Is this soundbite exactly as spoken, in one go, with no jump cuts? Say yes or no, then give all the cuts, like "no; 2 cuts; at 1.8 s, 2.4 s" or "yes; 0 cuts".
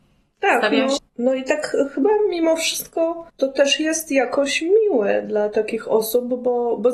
no; 2 cuts; at 1.0 s, 3.3 s